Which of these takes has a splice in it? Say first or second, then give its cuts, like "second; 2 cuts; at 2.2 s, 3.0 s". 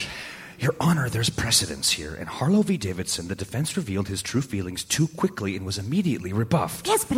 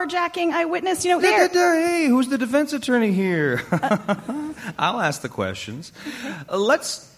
second; 1 cut; at 1.2 s